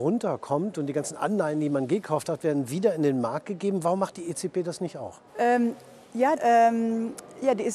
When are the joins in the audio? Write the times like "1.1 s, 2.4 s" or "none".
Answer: 5.3 s, 6.3 s

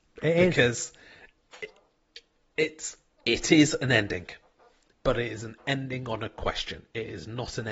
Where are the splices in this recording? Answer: 1.4 s, 4.9 s

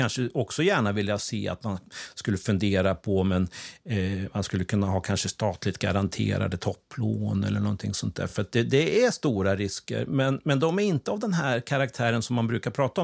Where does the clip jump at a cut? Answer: none

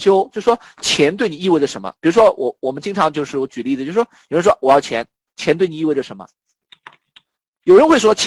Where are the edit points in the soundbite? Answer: 5.3 s

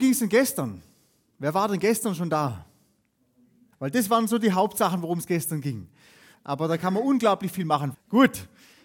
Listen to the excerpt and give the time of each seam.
3.7 s, 6.3 s, 7.9 s

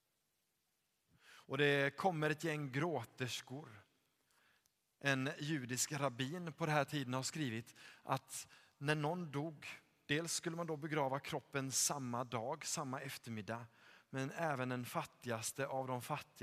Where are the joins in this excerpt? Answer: 1.1 s

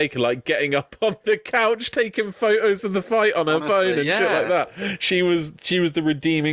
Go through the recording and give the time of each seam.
none

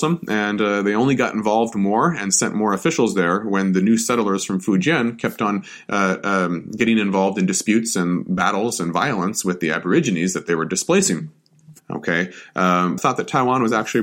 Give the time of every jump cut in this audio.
11.8 s, 13.0 s

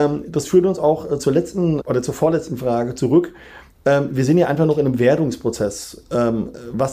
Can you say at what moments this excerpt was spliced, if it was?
1.8 s

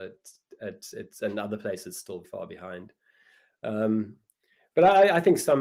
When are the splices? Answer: 2.2 s

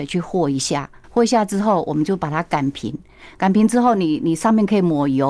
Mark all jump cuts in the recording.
none

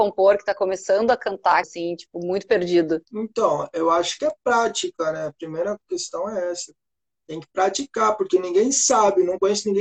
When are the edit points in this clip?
1.6 s, 3.0 s

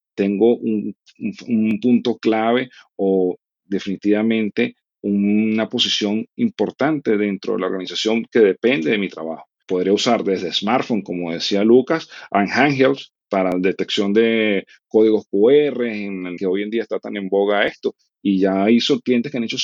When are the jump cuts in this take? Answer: 9.6 s, 16.4 s

